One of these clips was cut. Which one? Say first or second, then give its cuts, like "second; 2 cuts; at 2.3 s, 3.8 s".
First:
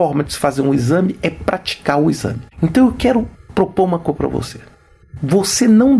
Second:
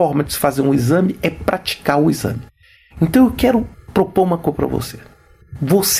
first; 1 cut; at 2.5 s